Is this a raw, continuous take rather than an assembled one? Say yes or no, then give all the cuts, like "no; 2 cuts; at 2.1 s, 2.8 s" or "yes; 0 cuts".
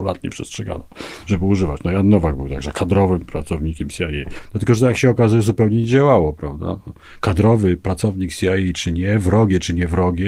yes; 0 cuts